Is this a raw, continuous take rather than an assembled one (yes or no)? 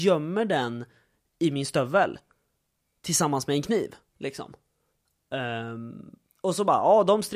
yes